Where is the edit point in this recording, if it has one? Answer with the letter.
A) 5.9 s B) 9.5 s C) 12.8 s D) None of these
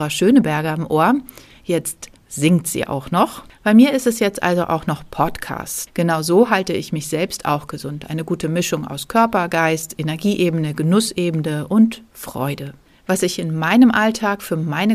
A